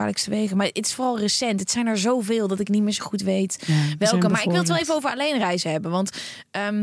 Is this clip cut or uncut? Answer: uncut